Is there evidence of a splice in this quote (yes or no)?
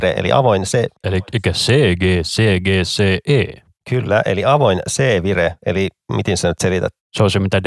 no